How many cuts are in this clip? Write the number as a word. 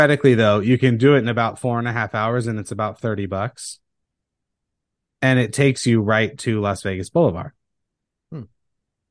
zero